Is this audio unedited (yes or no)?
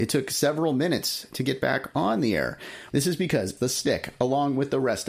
no